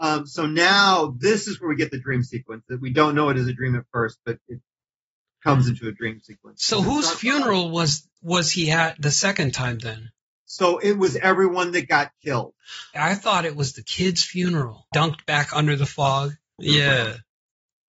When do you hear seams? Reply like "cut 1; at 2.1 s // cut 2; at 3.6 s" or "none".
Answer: cut 1; at 13.0 s // cut 2; at 14.9 s // cut 3; at 16.6 s